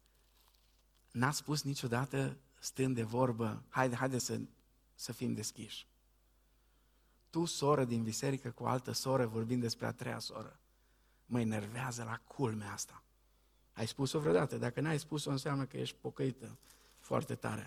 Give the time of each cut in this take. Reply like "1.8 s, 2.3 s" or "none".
none